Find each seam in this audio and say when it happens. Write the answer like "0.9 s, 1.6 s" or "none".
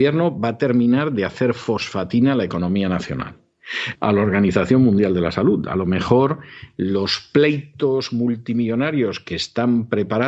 3.9 s